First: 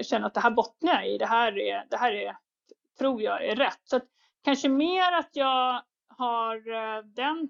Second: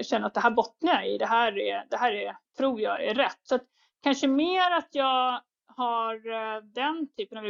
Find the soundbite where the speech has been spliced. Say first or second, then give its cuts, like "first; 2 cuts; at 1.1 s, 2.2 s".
second; 1 cut; at 2.5 s